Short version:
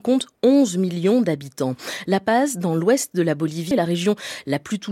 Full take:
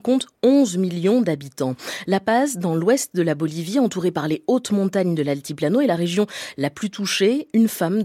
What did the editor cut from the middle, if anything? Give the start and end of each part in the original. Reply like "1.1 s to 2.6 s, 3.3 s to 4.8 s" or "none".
3.7 s to 5.8 s